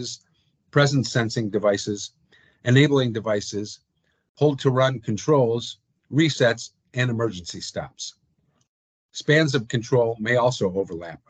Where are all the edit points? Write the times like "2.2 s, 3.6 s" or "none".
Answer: none